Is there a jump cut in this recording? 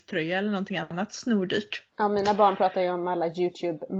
no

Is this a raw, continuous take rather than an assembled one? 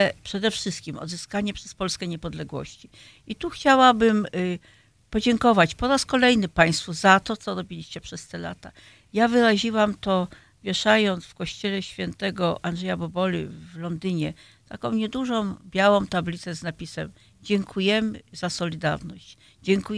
yes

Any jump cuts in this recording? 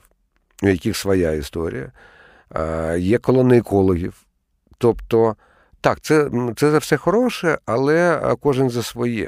no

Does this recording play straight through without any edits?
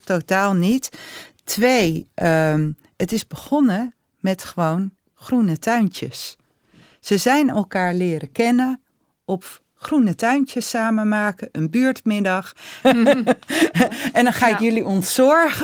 no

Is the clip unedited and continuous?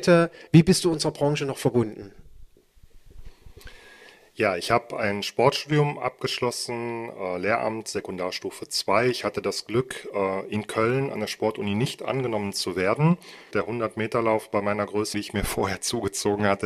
no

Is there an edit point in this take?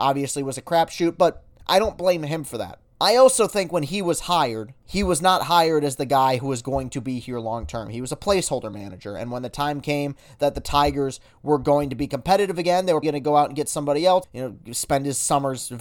yes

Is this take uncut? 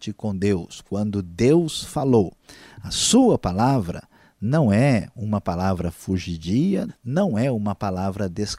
no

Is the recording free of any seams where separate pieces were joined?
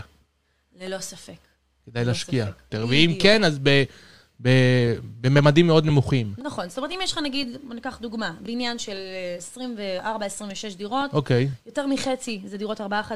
no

